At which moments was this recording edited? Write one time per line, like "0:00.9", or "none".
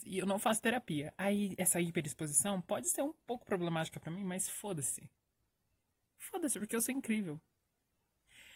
none